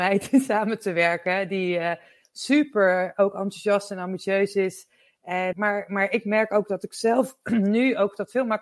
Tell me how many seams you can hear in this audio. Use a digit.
1